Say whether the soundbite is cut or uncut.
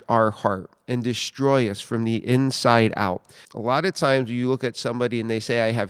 cut